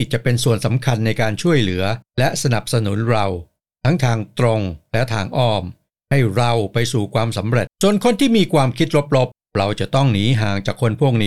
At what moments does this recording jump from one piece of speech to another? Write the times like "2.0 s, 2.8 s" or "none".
7.7 s